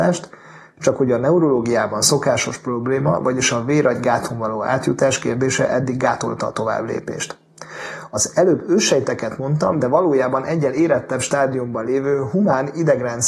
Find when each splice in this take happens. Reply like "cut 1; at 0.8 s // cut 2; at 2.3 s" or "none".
none